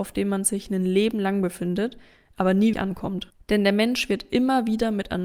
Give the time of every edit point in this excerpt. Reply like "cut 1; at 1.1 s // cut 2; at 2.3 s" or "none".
cut 1; at 2.7 s